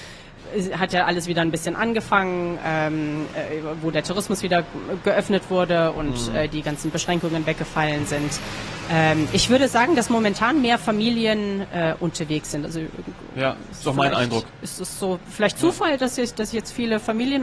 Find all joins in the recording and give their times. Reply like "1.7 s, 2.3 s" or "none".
none